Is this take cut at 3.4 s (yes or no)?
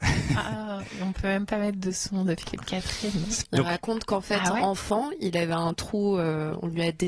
yes